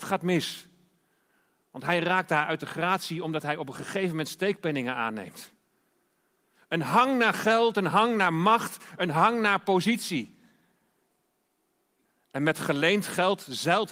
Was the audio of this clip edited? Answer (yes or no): no